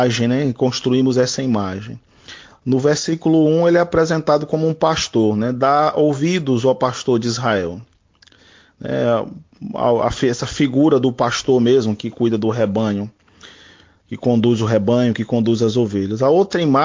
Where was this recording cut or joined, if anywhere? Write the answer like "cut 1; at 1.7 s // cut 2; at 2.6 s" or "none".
cut 1; at 2.5 s